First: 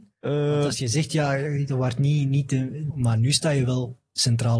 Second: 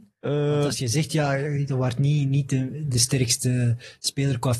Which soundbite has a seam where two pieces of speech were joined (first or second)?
first